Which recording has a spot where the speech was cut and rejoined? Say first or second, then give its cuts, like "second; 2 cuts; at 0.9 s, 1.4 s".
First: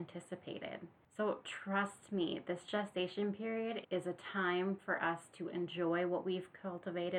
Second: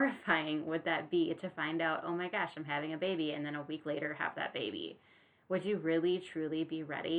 first; 2 cuts; at 1.0 s, 3.8 s